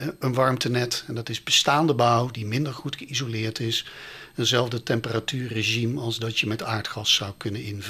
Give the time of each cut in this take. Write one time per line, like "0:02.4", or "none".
none